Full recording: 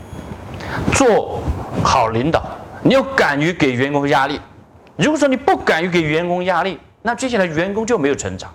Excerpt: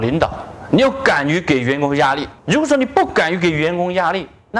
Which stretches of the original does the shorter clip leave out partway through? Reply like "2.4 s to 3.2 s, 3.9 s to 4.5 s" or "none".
4.5 s to 4.9 s